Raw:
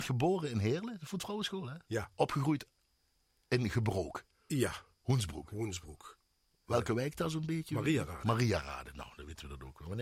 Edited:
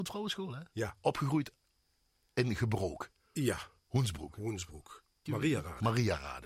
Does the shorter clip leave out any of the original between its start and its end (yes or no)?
yes